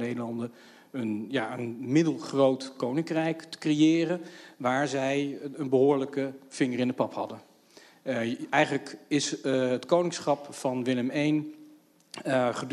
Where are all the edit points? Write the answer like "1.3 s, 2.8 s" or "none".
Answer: none

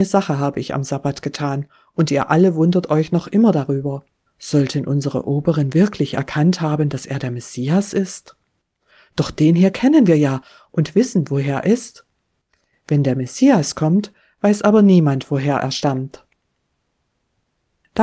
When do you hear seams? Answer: 4.3 s, 11.6 s

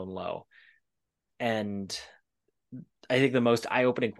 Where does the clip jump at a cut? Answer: 1.3 s

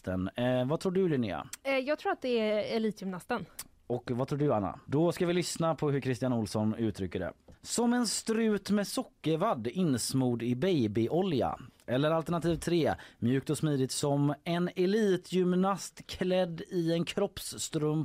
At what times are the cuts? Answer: 4.8 s, 7.5 s

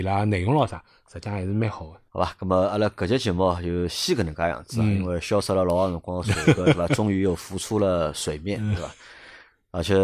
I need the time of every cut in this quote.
2.1 s

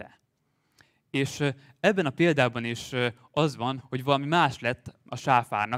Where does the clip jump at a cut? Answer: 3.8 s

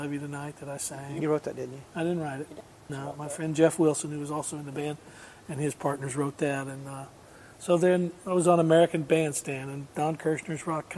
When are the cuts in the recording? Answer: none

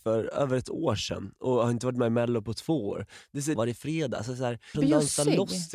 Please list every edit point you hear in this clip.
3.6 s, 4.7 s

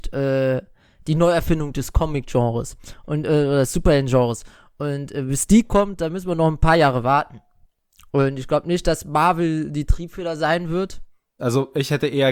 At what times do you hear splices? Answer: 11.4 s

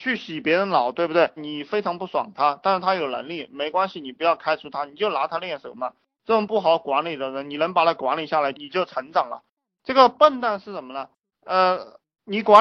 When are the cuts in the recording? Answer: 1.4 s, 11.3 s

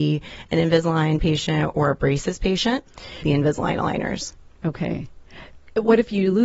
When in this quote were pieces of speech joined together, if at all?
3.2 s

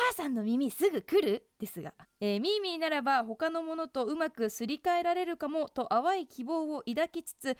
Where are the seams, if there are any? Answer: 2.0 s

